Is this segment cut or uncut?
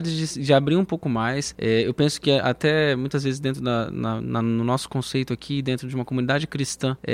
uncut